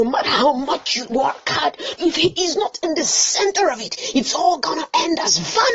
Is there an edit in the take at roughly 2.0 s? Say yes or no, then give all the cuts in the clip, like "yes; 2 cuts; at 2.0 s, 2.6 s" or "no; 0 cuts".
yes; 1 cut; at 2.0 s